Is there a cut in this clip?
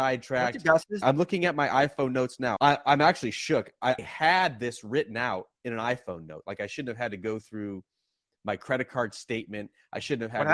yes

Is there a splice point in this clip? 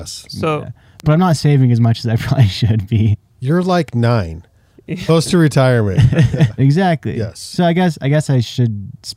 yes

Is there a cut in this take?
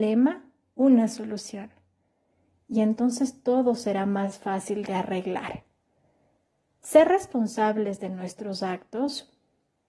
no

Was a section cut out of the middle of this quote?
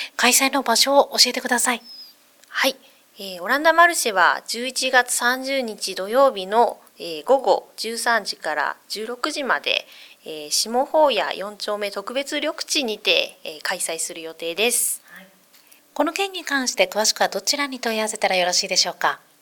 no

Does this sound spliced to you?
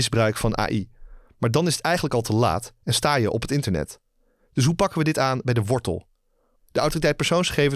yes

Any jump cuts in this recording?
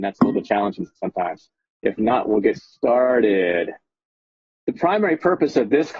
yes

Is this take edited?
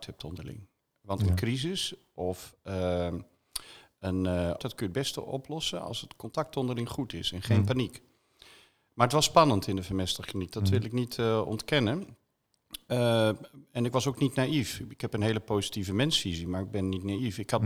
yes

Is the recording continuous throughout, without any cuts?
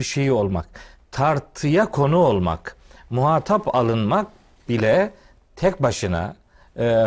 yes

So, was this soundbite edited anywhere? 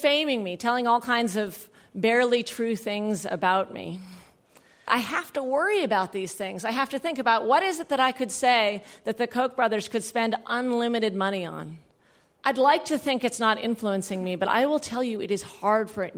no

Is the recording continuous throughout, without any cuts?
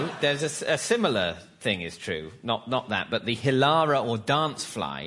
yes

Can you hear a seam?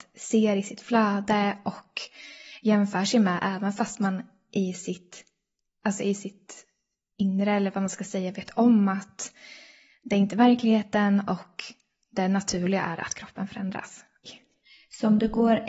yes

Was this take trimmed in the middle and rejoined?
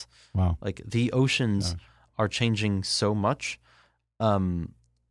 no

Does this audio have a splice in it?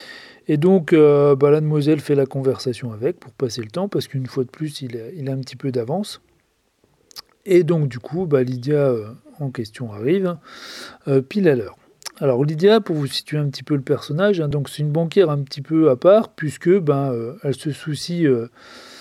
no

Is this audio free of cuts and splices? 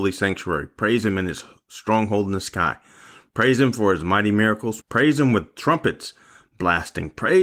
no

